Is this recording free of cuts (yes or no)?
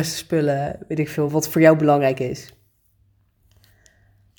no